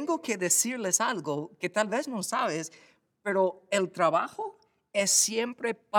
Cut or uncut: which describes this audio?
uncut